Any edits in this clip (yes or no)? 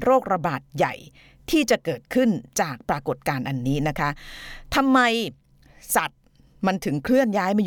no